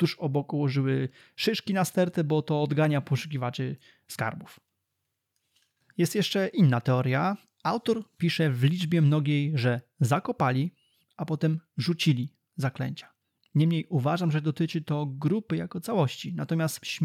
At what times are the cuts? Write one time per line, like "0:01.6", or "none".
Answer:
none